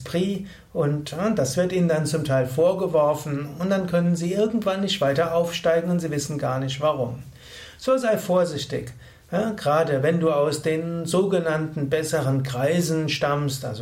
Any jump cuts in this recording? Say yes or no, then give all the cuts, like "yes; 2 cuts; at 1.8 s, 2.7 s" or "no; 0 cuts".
no; 0 cuts